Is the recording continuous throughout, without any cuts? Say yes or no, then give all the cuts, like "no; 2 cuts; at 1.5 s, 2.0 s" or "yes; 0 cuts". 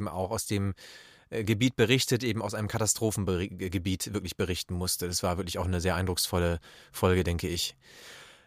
yes; 0 cuts